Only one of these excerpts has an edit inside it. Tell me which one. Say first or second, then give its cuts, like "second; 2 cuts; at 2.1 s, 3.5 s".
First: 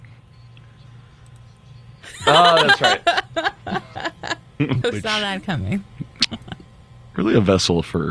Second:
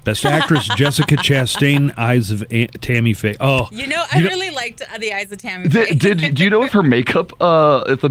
first; 1 cut; at 4.8 s